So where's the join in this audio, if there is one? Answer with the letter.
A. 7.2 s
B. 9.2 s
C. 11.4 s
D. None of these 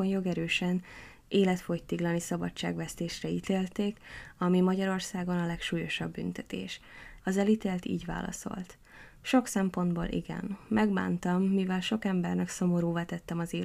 A